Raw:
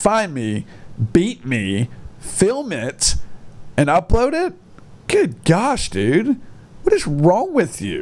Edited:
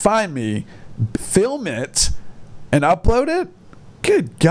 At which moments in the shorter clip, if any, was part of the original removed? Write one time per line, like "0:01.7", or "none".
0:01.1